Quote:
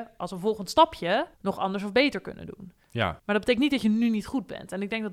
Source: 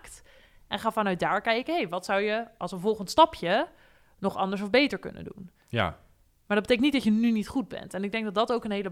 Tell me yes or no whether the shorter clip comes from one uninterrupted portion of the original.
no